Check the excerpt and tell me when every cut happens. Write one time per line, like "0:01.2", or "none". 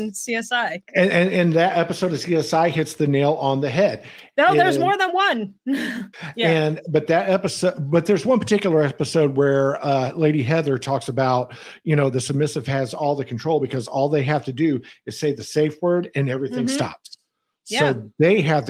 0:06.1